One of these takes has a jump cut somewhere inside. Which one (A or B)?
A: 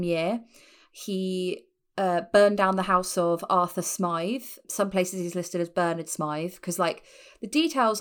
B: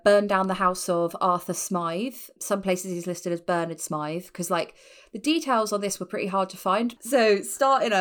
B